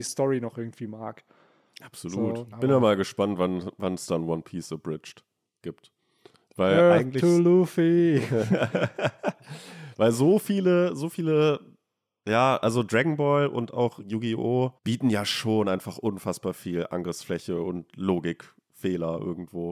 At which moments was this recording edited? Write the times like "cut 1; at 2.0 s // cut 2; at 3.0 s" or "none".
cut 1; at 2.5 s // cut 2; at 14.8 s